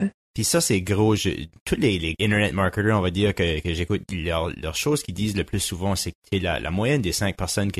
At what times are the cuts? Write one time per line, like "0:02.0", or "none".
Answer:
none